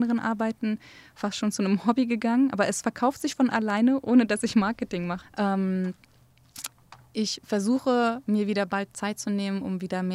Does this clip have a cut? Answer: yes; 1 cut; at 5.2 s

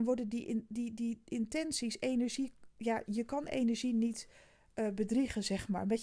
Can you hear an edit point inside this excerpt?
no; 0 cuts

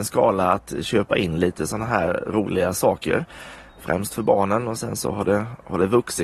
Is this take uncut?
yes; 0 cuts

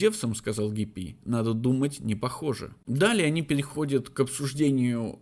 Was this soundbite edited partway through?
yes; 1 cut; at 2.8 s

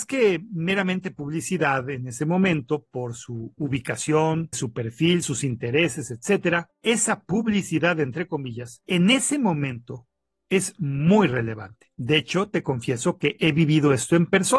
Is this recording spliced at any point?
yes; 1 cut; at 4.5 s

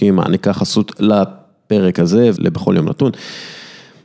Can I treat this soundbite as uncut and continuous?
no; 1 cut; at 2.4 s

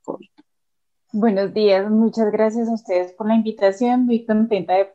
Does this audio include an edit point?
yes; 1 cut; at 1.0 s

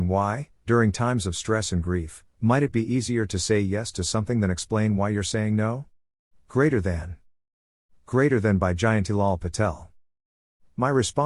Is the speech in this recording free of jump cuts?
yes; 0 cuts

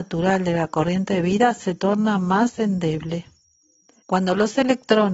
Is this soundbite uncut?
no; 1 cut; at 4.0 s

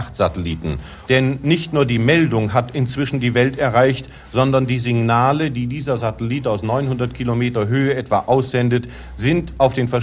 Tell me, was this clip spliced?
yes; 1 cut; at 1.1 s

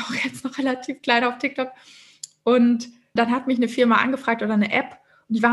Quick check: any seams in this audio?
yes; 1 cut; at 3.2 s

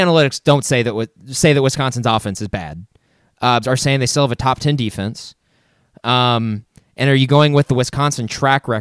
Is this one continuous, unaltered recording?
no; 1 cut; at 3.6 s

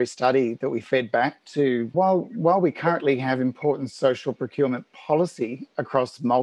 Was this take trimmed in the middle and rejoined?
yes; 1 cut; at 1.9 s

